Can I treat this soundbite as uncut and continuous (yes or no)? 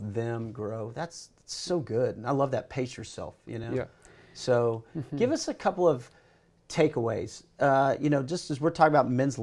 yes